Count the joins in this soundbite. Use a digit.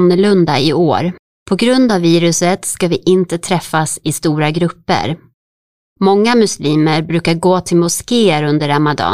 1